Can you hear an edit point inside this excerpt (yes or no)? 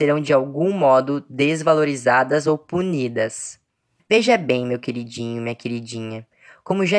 yes